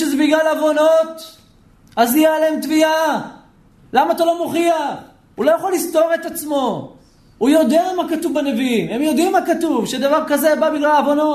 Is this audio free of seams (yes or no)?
no